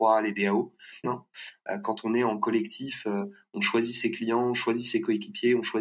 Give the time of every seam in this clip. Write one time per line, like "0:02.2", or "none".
0:01.0

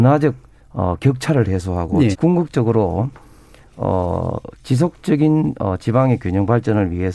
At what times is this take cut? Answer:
0:02.1

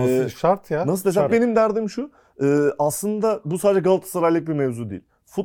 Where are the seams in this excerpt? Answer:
0:01.3

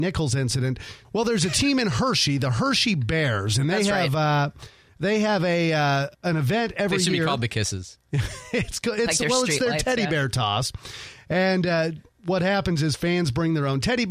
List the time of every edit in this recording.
0:01.0
0:06.1

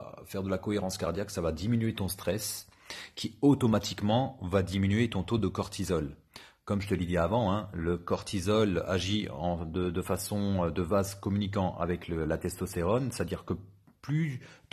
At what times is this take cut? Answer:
none

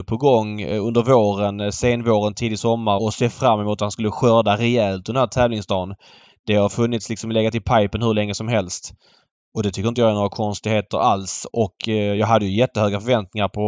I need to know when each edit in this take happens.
0:03.0
0:11.5

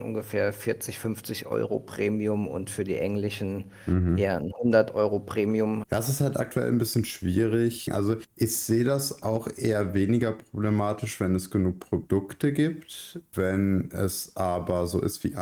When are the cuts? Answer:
0:05.8

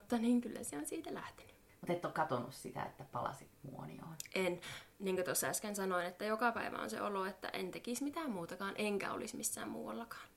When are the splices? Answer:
0:04.9

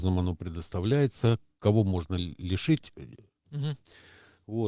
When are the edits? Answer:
0:03.4

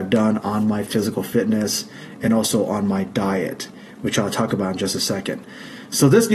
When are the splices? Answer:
none

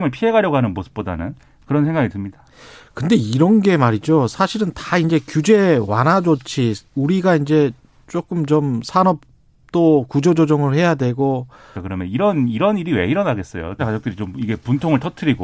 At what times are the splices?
0:11.7
0:13.8

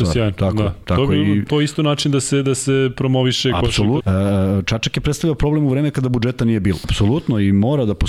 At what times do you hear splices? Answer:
0:04.0
0:06.8

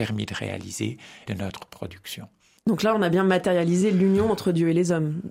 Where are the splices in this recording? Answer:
0:01.3

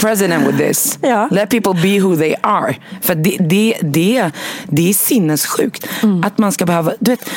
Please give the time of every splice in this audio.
none

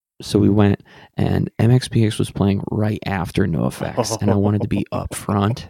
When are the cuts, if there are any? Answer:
none

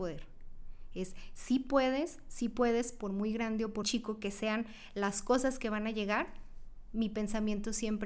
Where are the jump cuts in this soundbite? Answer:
0:03.8

